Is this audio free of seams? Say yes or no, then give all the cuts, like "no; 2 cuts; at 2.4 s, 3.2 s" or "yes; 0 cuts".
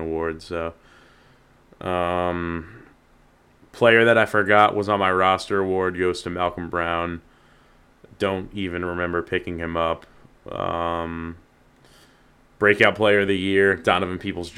yes; 0 cuts